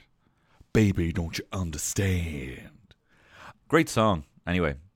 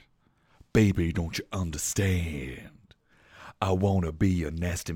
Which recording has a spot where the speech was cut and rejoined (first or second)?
first